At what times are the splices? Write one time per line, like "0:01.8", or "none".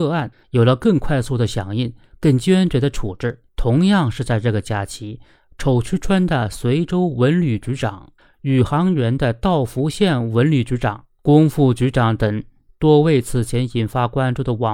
0:03.5